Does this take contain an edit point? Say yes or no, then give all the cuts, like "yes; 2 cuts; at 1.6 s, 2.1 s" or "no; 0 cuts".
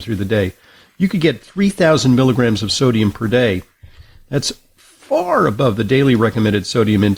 no; 0 cuts